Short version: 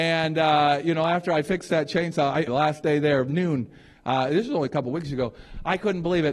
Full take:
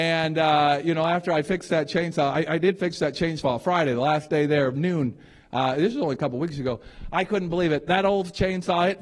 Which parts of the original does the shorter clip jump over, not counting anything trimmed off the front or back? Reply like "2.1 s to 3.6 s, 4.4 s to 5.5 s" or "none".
2.5 s to 3.9 s